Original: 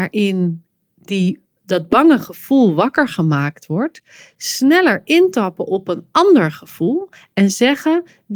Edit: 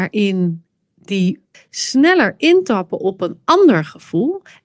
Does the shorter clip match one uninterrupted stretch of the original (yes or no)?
no